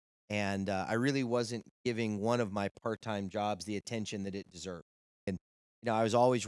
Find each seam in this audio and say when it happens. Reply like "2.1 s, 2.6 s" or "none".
5.3 s